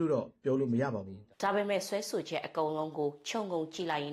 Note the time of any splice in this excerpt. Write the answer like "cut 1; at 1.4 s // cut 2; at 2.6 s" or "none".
cut 1; at 1.3 s